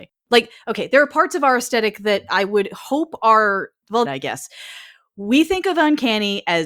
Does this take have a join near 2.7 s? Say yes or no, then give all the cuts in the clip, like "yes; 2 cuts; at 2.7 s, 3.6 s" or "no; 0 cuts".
no; 1 cut; at 4.0 s